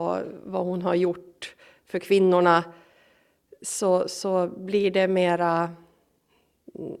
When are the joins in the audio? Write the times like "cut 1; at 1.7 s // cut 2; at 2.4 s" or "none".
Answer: none